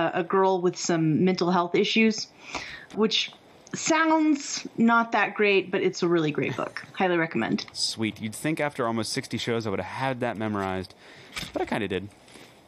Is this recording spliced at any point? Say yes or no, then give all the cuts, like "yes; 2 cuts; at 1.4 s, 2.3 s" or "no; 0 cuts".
yes; 2 cuts; at 2.9 s, 7.7 s